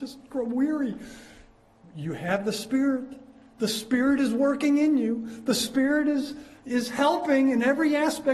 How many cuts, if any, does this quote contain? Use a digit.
0